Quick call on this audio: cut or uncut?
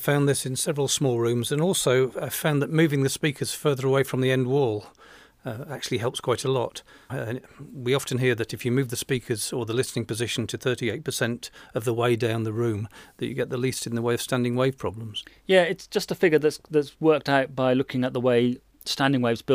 cut